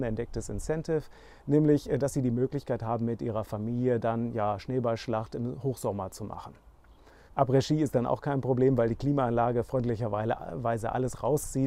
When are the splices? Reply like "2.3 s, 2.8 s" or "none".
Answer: 7.3 s